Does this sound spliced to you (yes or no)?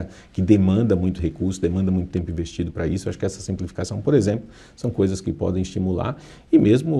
no